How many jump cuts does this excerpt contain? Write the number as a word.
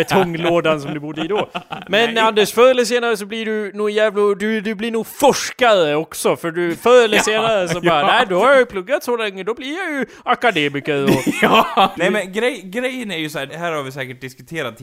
two